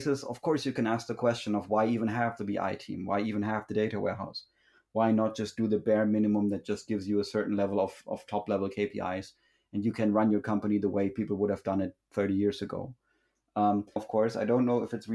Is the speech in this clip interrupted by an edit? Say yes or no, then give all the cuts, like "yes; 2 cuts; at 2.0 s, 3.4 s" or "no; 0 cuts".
yes; 1 cut; at 14.0 s